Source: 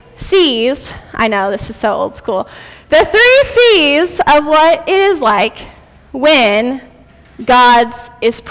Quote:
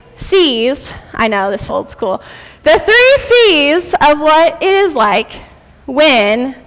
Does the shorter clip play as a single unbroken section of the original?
no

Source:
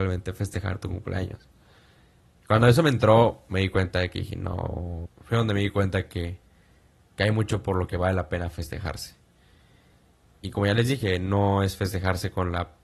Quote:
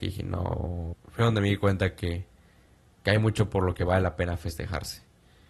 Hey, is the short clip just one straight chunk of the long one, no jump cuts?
yes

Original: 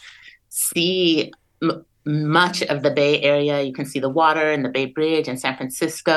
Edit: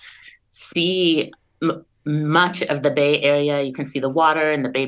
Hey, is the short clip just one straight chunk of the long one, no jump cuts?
yes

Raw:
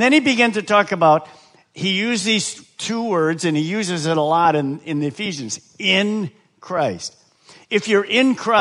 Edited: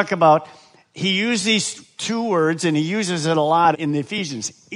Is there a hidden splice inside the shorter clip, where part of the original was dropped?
yes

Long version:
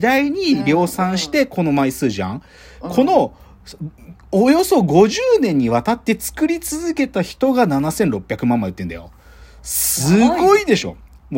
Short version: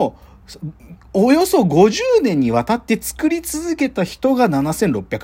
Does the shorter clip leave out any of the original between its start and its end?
no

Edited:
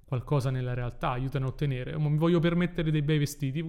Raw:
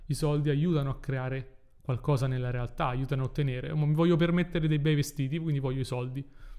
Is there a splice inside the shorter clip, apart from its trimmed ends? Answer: no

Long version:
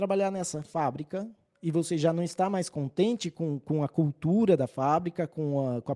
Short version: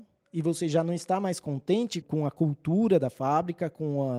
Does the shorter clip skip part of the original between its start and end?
yes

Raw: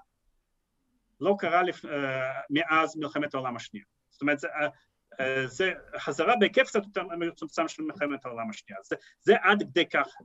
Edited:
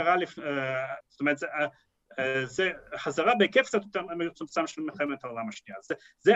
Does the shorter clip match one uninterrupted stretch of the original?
no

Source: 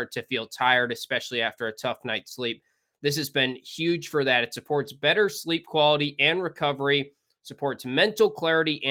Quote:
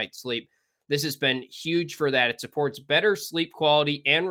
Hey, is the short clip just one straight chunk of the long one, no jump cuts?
yes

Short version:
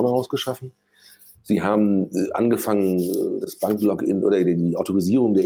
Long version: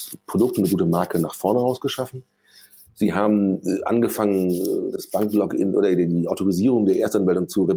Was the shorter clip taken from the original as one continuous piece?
yes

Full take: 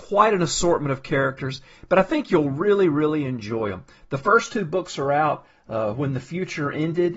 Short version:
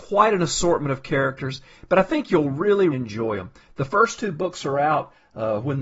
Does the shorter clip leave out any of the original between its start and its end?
yes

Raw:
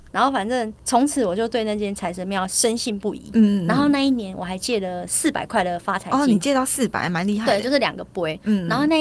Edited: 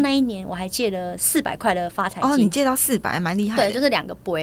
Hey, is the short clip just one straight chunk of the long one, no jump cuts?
yes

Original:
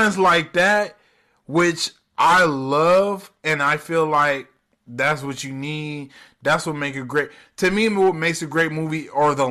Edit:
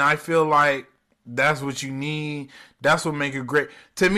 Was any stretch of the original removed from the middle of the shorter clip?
no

